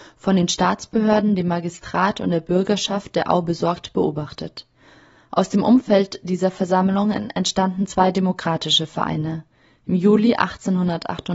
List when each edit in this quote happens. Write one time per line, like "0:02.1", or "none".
none